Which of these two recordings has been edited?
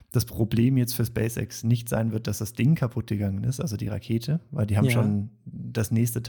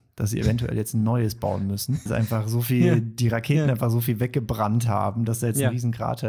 second; 1 cut; at 2.1 s

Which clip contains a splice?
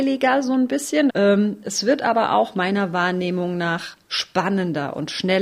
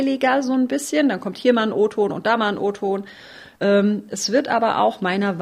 first; 1 cut; at 1.1 s

